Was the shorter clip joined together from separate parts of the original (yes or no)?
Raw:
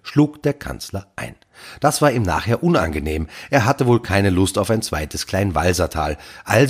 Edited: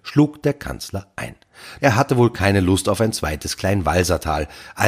yes